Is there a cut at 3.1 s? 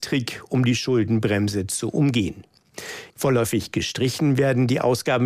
yes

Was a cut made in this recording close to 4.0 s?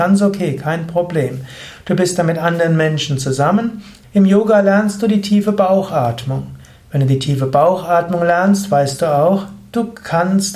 yes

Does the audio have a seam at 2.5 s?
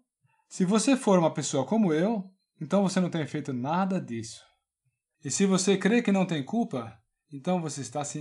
no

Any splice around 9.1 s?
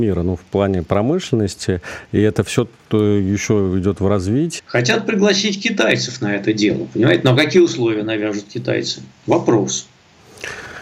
no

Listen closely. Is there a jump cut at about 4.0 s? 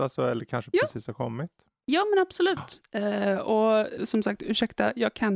yes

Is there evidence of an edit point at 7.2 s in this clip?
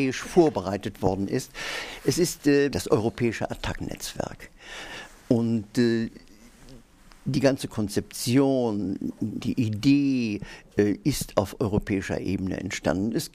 no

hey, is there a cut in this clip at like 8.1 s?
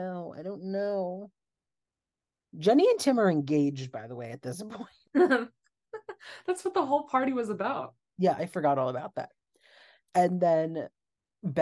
no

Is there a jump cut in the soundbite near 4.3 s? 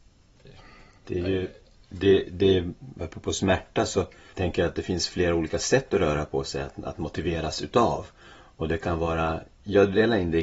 yes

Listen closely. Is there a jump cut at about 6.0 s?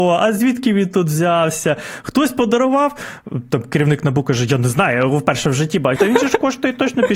yes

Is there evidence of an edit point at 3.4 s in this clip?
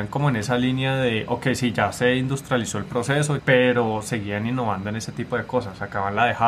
yes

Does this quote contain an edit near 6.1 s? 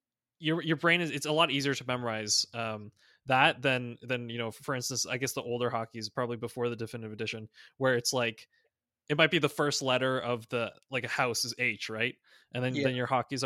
no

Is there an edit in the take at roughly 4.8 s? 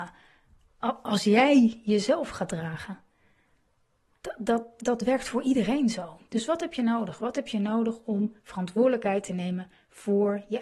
yes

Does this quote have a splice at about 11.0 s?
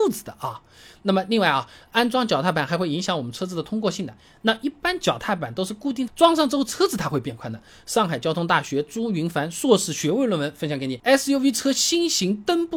no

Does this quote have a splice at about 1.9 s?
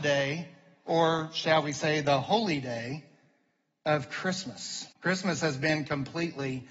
no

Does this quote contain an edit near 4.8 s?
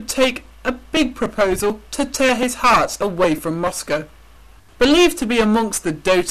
yes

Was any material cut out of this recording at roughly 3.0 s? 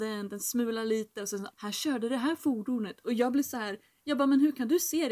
no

